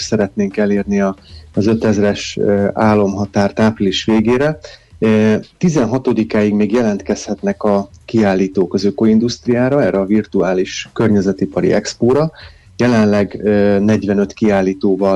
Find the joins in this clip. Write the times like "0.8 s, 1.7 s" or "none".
none